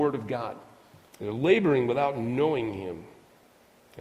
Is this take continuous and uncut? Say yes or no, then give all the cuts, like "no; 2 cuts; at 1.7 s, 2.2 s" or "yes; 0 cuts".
no; 1 cut; at 1.1 s